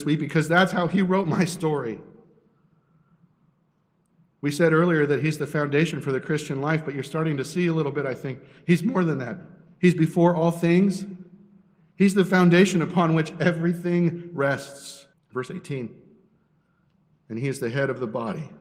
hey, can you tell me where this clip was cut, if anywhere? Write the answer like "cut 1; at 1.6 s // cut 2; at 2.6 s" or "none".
cut 1; at 15.1 s